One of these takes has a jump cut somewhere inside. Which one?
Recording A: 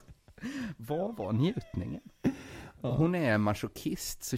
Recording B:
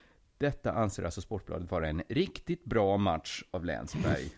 A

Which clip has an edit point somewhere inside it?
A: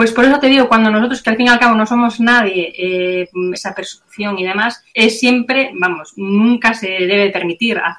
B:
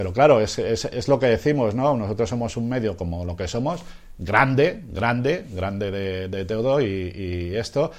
A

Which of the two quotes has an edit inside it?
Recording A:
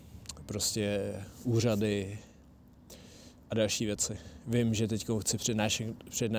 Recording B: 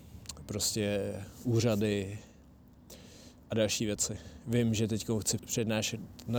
B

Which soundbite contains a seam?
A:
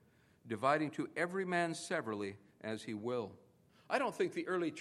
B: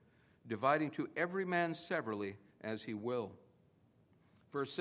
A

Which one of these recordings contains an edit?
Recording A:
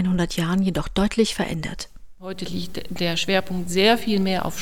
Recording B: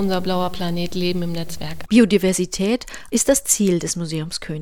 B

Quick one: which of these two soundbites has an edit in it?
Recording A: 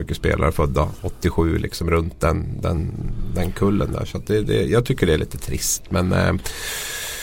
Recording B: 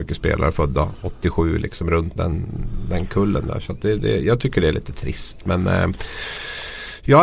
B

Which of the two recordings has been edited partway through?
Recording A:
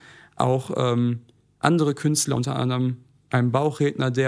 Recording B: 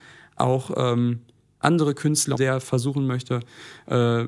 B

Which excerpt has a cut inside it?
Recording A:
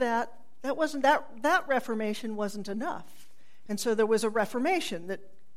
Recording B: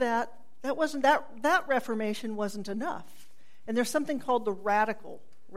A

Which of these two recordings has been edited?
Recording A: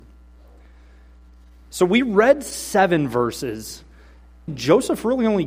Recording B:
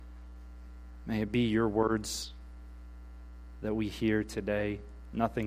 A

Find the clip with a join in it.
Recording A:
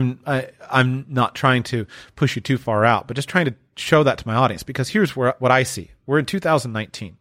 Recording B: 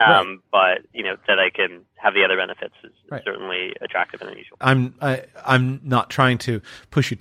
B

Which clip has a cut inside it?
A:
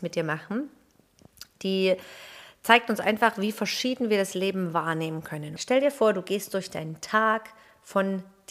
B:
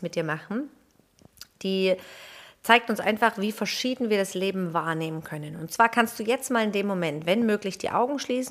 A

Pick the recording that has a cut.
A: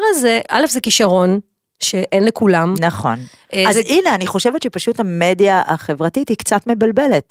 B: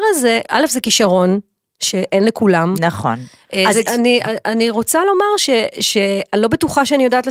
B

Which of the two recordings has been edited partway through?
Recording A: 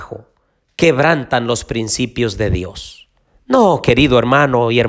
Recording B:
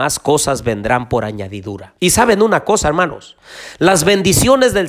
B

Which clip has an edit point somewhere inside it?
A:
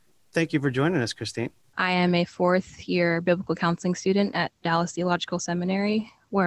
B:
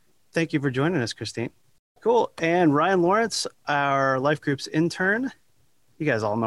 A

